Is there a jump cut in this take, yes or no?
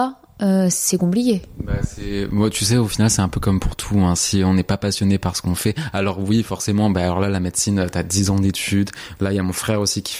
yes